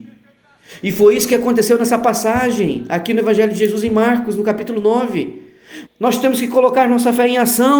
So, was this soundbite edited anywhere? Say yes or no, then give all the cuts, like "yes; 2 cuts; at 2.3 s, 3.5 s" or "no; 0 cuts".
yes; 1 cut; at 5.9 s